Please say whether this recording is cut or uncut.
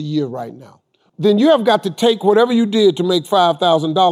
cut